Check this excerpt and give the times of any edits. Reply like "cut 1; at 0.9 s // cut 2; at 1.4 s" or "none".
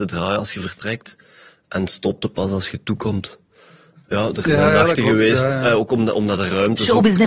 none